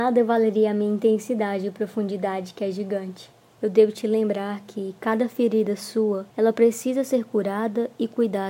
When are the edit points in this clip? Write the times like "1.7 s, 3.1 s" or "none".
3.6 s, 6.3 s